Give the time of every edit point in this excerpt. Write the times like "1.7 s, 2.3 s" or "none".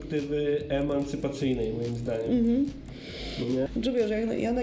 3.7 s